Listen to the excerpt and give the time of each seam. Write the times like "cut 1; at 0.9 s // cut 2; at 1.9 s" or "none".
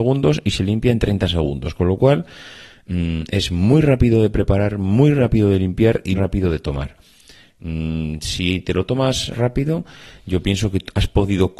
cut 1; at 6.1 s // cut 2; at 9.3 s